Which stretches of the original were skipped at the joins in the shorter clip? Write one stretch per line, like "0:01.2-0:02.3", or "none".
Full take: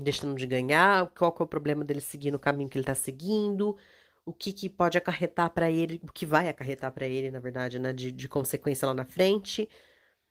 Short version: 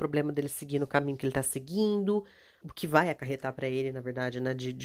0:04.1-0:06.0